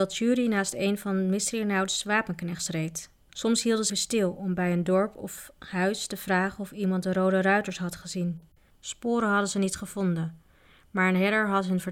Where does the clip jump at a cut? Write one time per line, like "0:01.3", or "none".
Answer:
0:03.9
0:08.7